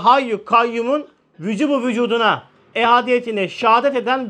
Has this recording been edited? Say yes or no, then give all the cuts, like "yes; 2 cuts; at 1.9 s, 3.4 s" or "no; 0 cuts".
yes; 1 cut; at 2.7 s